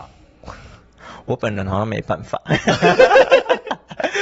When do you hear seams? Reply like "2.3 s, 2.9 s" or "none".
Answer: none